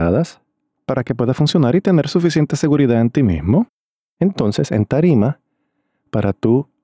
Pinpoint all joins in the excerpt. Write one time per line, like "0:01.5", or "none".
none

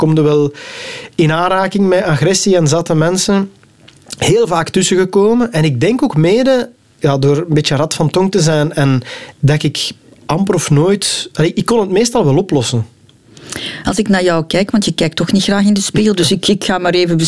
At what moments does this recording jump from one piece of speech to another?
0:09.3

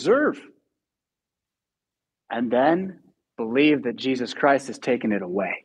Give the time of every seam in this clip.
0:03.3

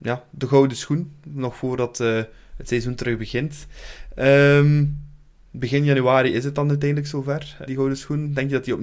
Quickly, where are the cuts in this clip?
0:05.5
0:07.7

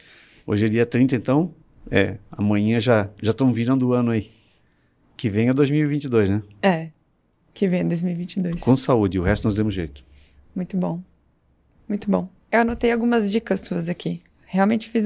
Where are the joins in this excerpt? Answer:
none

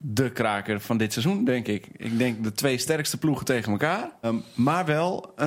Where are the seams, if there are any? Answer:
0:04.2

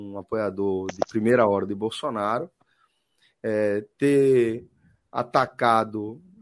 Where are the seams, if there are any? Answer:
none

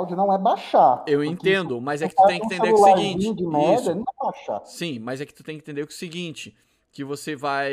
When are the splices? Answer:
none

